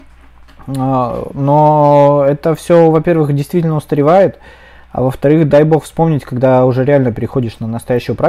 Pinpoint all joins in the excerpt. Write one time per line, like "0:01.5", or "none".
none